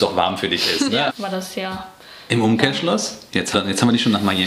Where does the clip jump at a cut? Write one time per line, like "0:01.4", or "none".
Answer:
0:01.1
0:03.5